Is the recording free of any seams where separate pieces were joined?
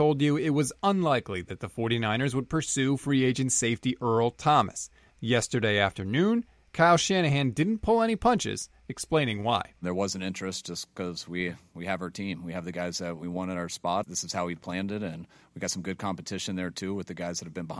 no; 1 cut; at 14.0 s

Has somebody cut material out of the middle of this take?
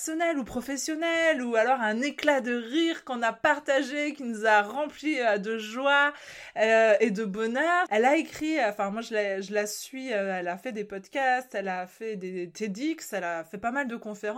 yes; 1 cut; at 7.9 s

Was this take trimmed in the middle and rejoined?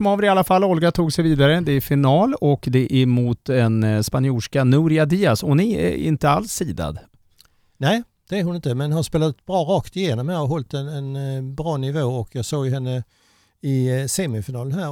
no; 0 cuts

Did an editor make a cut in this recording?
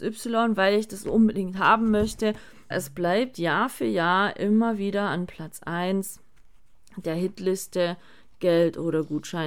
yes; 1 cut; at 2.7 s

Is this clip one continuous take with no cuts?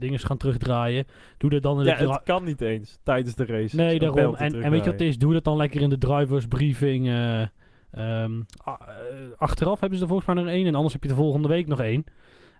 yes; 0 cuts

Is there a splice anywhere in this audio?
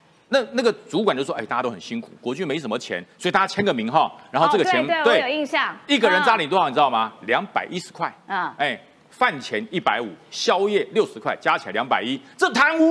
no; 0 cuts

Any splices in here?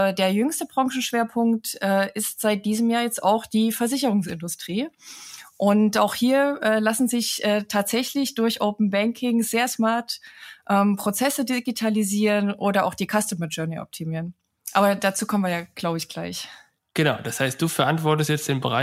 no; 0 cuts

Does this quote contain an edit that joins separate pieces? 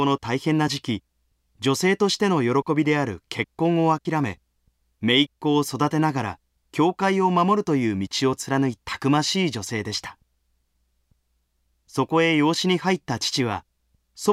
yes; 1 cut; at 8.8 s

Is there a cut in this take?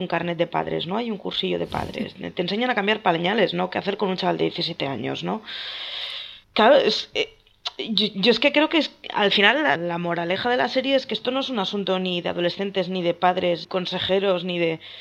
yes; 3 cuts; at 6.4 s, 9.8 s, 13.6 s

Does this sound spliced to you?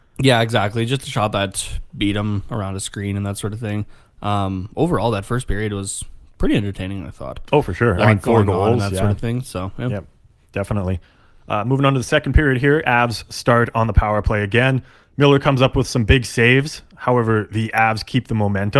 no; 0 cuts

